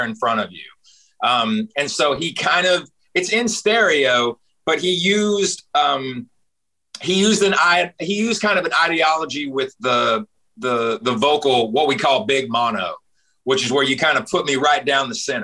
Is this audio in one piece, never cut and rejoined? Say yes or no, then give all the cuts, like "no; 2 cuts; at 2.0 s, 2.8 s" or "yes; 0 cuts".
yes; 0 cuts